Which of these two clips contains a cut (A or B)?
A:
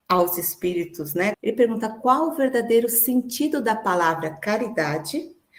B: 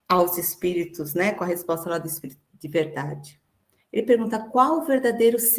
A